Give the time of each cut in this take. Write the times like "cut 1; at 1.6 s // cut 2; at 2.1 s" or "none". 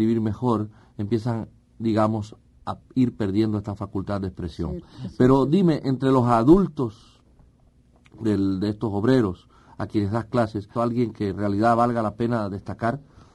cut 1; at 10.8 s